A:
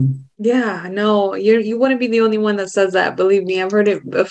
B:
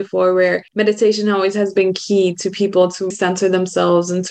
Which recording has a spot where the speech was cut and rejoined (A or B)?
B